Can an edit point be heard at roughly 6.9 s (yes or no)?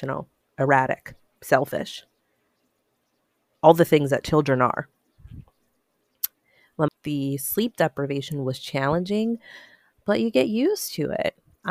yes